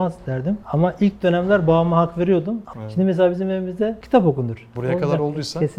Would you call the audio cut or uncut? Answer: cut